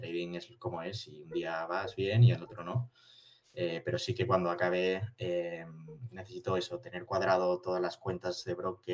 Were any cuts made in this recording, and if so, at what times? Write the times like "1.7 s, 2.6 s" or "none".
none

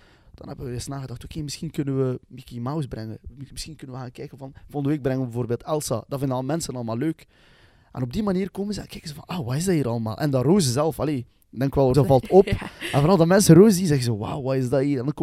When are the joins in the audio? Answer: 11.9 s

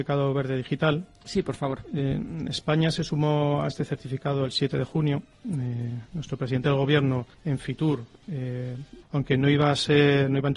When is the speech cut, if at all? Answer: 7.3 s, 9.0 s

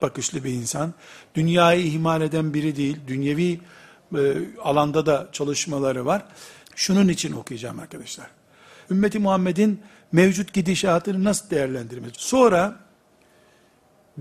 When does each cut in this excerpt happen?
6.6 s, 8.8 s, 12.1 s

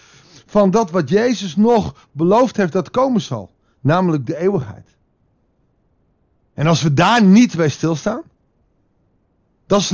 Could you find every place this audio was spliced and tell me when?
none

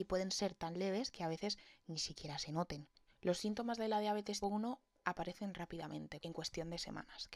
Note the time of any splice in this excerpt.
3.1 s, 4.4 s, 6.2 s

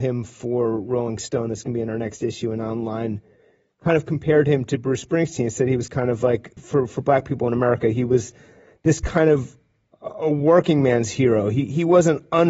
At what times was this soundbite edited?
6.6 s

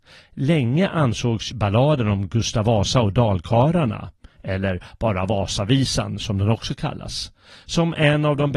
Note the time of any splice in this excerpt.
1.5 s

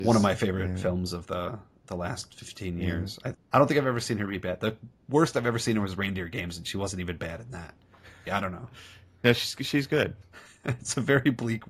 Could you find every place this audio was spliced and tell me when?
3.3 s, 8.3 s, 10.2 s

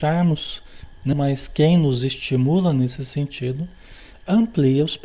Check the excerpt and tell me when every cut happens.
1.1 s

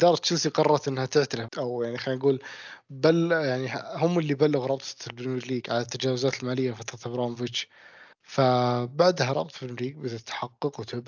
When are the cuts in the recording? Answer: 1.5 s, 8.1 s

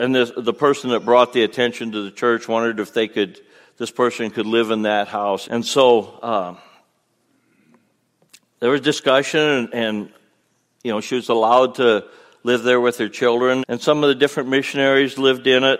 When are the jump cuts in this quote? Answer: 5.4 s, 13.6 s

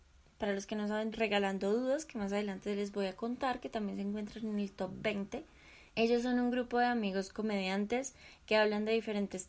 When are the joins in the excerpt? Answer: 1.1 s, 5.9 s

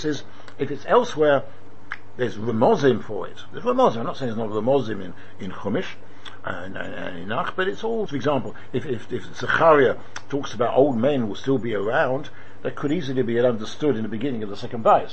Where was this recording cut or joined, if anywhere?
8.1 s

